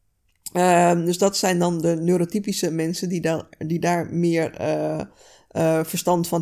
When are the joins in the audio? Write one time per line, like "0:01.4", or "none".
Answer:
none